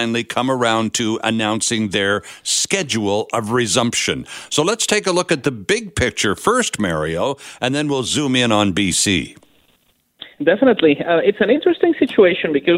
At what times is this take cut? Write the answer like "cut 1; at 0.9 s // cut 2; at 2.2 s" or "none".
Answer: none